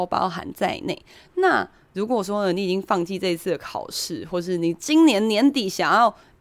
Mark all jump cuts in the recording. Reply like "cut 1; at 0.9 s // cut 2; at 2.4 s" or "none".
cut 1; at 1.3 s

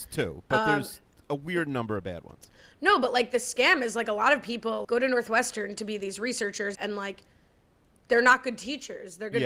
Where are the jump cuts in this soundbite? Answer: cut 1; at 4.8 s // cut 2; at 6.7 s

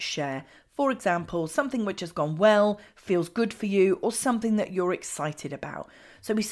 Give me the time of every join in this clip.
none

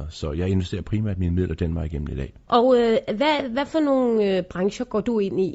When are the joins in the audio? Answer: cut 1; at 2.5 s

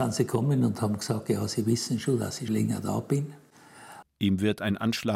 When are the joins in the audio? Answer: cut 1; at 2.5 s // cut 2; at 4.0 s

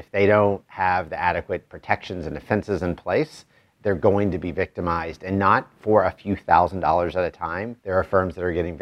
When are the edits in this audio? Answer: cut 1; at 7.8 s

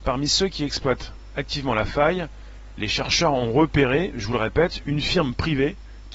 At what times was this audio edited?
none

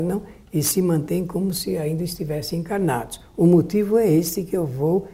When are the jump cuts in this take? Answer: none

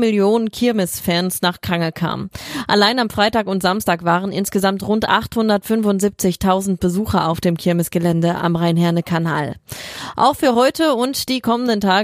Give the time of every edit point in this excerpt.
none

